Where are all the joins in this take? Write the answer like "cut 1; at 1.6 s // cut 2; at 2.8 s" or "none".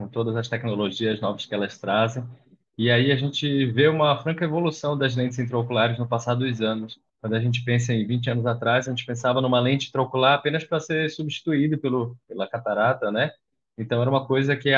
cut 1; at 7.1 s

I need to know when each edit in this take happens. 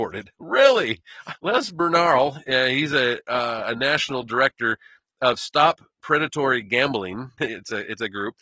cut 1; at 1.4 s // cut 2; at 7.4 s

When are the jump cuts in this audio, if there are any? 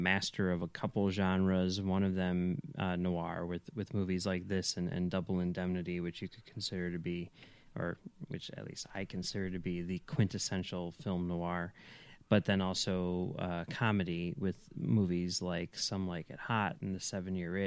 none

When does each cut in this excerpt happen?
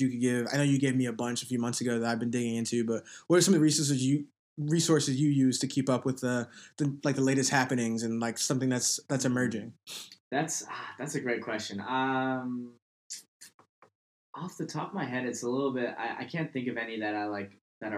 cut 1; at 10.2 s

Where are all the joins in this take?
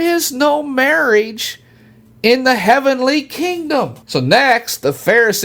cut 1; at 4.0 s

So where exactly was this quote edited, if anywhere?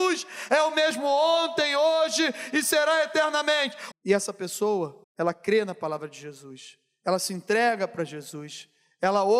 cut 1; at 3.9 s // cut 2; at 5.0 s

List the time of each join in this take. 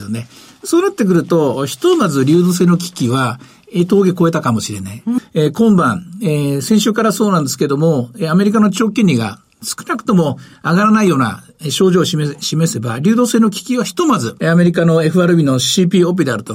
cut 1; at 5.2 s // cut 2; at 14.4 s

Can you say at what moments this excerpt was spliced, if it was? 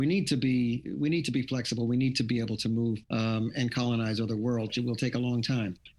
cut 1; at 3.0 s // cut 2; at 4.7 s

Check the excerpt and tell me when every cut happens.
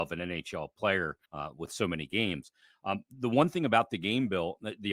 cut 1; at 1.3 s

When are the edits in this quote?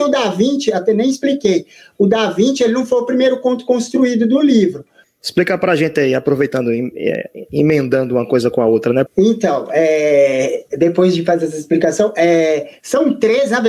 cut 1; at 5.0 s // cut 2; at 9.1 s // cut 3; at 10.7 s

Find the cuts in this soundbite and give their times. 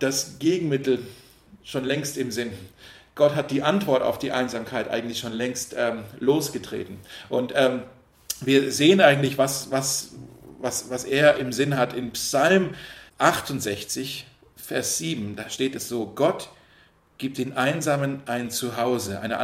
none

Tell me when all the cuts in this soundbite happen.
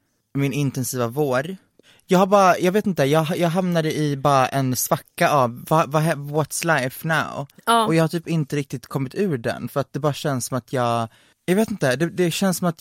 none

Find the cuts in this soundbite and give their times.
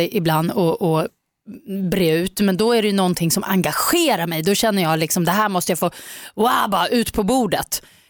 none

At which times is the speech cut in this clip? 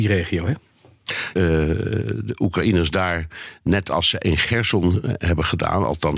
cut 1; at 1.3 s

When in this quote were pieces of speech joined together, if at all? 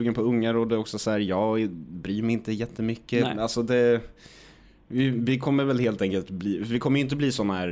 none

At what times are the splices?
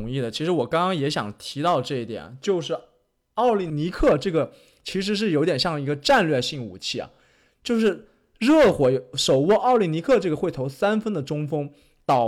none

